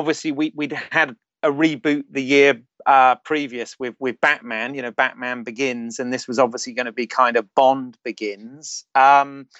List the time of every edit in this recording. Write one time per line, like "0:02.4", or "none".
none